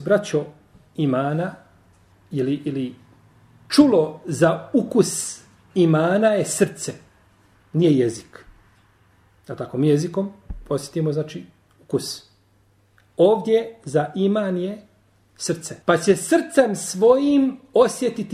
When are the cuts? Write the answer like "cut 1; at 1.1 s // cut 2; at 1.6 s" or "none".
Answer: cut 1; at 15.8 s